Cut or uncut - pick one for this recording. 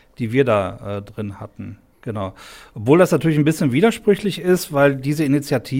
cut